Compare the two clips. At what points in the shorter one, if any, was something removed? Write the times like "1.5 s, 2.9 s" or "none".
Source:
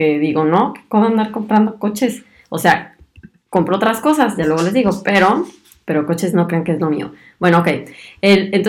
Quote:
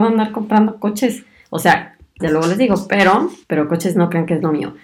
2.2 s, 3.4 s